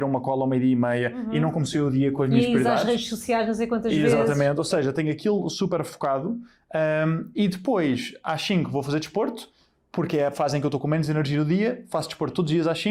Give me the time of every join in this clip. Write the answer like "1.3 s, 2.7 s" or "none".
none